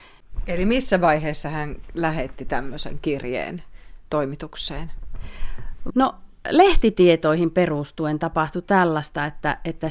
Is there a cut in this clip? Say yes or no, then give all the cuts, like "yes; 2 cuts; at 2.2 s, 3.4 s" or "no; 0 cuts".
yes; 1 cut; at 5.9 s